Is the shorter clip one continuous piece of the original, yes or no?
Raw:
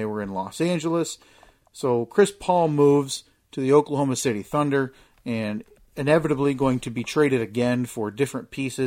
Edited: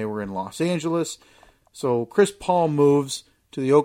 yes